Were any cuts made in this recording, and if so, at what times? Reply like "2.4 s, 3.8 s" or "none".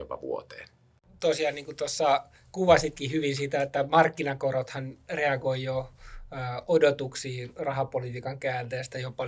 none